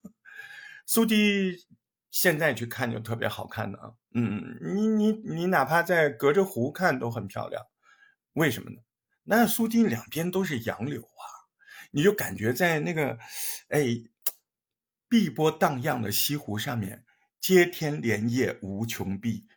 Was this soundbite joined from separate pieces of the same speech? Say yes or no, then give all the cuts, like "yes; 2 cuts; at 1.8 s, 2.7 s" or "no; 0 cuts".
yes; 1 cut; at 17.3 s